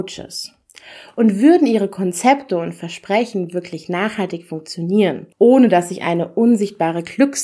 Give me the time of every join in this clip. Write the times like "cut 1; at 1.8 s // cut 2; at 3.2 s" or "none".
cut 1; at 5.3 s